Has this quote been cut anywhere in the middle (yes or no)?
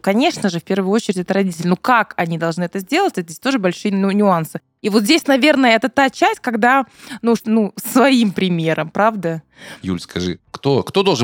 yes